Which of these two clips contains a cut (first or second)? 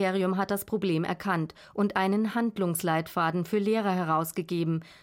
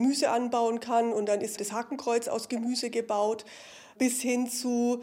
second